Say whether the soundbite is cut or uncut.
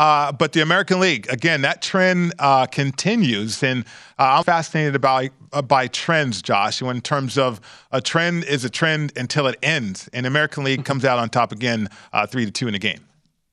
cut